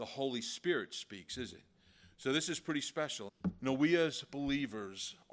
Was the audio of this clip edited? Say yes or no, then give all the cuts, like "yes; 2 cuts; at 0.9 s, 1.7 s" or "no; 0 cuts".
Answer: yes; 1 cut; at 3.3 s